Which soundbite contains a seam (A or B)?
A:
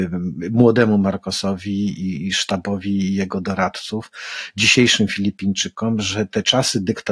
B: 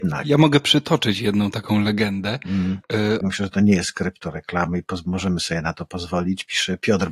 B